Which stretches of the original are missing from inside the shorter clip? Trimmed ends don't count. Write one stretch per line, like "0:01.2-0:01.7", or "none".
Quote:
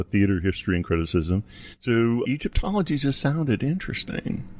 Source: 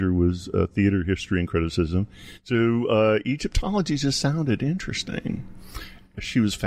0:02.9-0:03.2